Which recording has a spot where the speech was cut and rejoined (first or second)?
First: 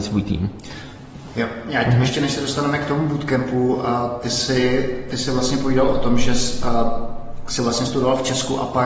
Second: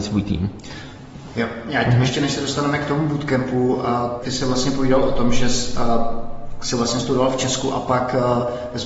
second